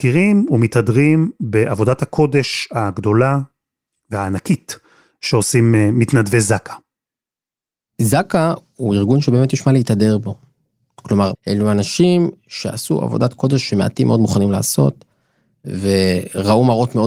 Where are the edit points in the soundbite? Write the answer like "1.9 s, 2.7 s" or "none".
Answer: 11.3 s